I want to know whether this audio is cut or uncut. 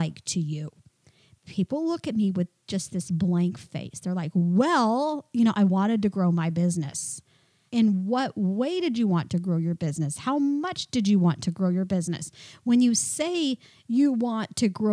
cut